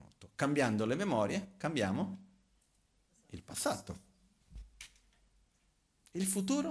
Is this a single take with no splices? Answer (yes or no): yes